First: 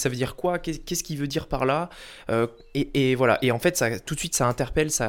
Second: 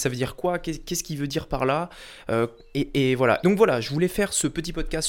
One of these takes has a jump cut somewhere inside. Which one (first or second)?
second